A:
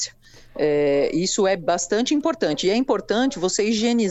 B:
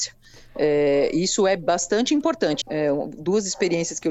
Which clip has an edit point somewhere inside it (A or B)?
B